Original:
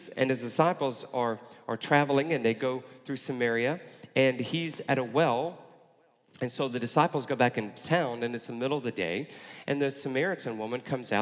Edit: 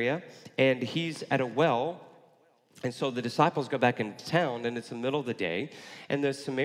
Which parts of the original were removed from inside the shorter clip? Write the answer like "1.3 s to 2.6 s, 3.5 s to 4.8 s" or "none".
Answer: none

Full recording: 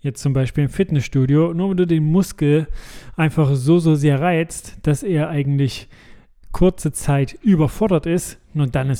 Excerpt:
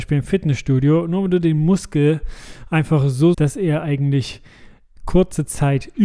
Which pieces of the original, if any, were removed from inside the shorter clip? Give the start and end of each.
3.8 s to 4.8 s

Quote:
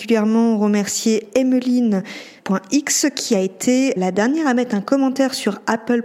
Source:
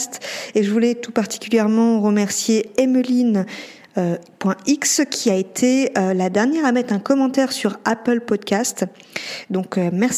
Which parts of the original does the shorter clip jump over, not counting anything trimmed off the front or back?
3.8 s to 4.3 s, 5.9 s to 6.1 s

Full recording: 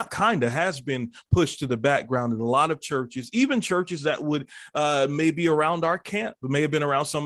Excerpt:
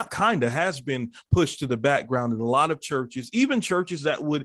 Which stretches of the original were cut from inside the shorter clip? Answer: none

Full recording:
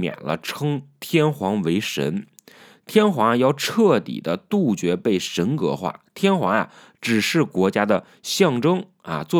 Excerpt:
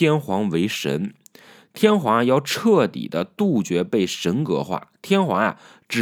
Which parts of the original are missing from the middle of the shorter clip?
none

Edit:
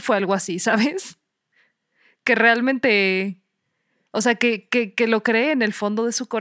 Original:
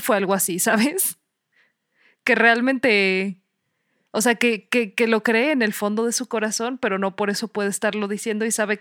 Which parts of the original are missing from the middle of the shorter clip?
none

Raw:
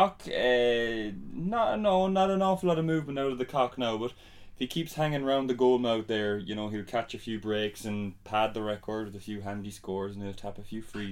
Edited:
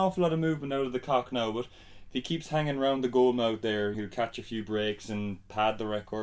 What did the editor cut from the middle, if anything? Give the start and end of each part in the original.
6.4 s to 6.7 s

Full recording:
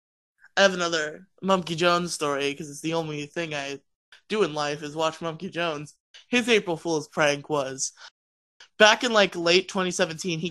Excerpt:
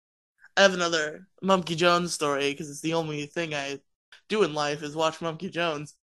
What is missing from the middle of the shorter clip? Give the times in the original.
none

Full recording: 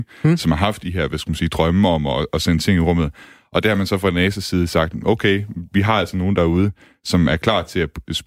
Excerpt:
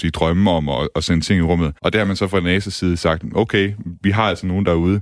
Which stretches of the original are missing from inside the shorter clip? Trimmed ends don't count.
3.2 s to 3.5 s

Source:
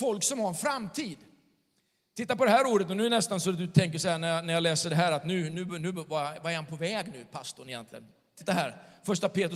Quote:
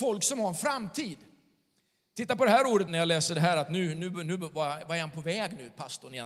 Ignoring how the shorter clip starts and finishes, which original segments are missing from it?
2.9 s to 4.4 s

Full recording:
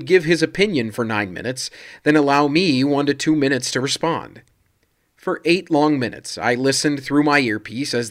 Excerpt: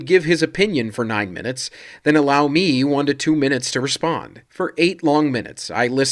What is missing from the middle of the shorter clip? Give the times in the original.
4.4 s to 5.1 s

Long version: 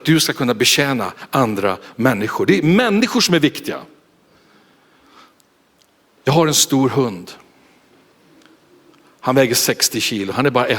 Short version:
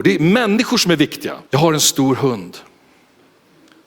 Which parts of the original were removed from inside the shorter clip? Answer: 3.9 s to 6.2 s

